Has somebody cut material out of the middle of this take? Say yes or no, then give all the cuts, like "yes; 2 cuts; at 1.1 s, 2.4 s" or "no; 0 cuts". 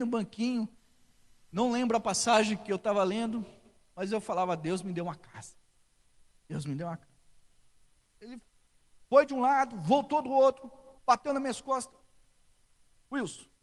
yes; 2 cuts; at 8.2 s, 11.0 s